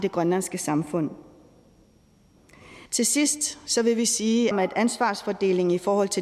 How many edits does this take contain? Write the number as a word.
two